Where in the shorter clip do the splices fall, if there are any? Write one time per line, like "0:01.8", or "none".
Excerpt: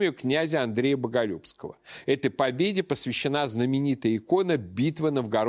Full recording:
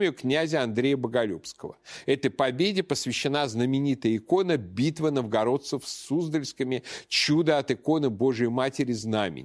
none